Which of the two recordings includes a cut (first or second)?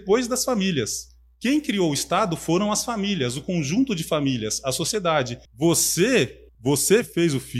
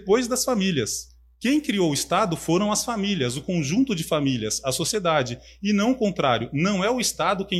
first